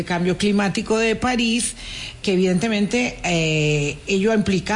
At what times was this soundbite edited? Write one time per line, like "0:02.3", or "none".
0:02.2